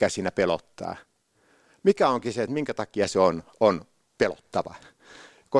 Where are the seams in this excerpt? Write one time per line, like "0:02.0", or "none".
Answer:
none

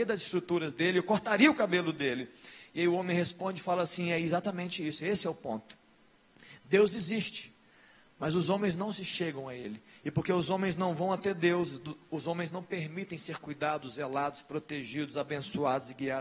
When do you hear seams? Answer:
none

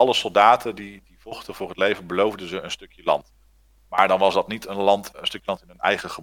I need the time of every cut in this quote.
0:05.1

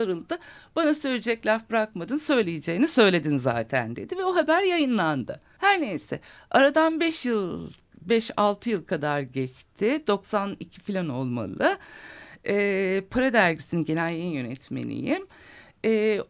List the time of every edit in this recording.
0:05.6

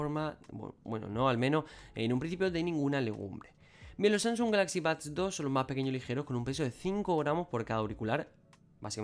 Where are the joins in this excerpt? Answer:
none

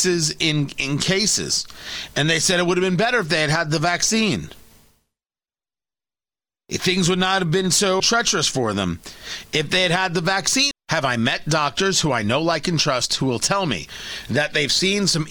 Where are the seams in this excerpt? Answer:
0:08.0
0:10.7

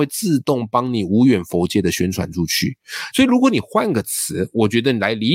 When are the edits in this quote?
0:03.1

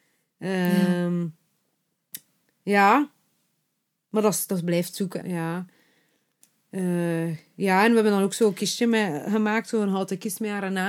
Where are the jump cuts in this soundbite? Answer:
0:05.2

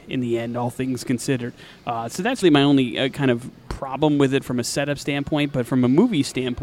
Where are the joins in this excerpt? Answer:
0:02.4

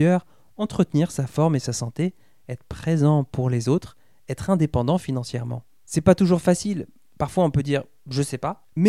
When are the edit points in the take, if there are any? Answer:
none

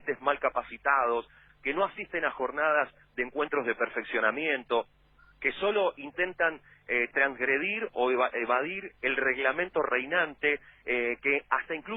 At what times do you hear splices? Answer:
0:01.5

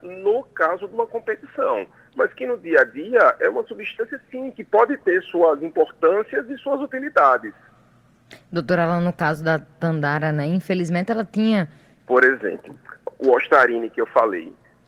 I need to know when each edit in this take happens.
0:12.0

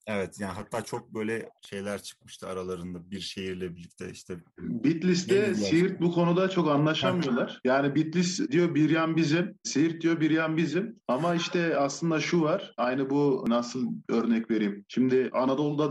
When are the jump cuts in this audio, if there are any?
none

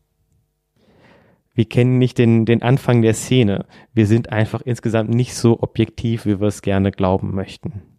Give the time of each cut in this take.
none

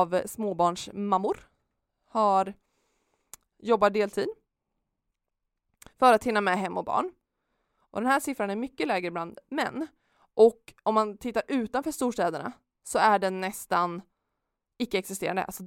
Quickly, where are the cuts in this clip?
0:03.5

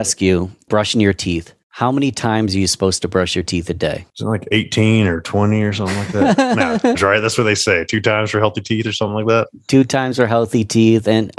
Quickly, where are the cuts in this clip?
0:04.1
0:06.9

